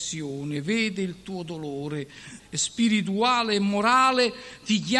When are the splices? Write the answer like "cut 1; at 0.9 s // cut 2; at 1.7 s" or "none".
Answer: cut 1; at 2.4 s